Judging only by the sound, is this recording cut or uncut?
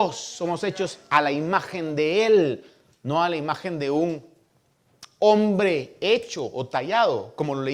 uncut